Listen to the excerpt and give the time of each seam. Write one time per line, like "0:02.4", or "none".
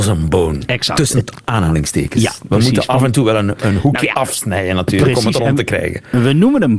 none